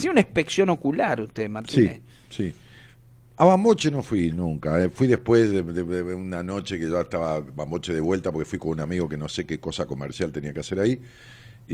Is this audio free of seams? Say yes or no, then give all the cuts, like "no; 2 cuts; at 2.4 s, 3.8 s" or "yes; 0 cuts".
yes; 0 cuts